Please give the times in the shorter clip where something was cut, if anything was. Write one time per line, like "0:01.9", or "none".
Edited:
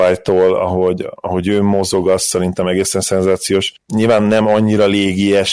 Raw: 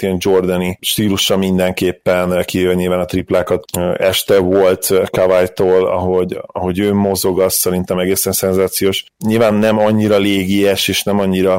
none